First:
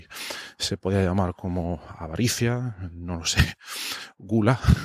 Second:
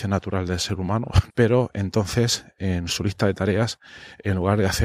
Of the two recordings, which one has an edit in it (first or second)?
second